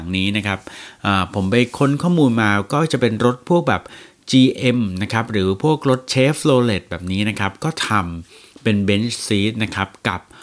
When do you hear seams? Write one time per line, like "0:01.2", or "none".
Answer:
none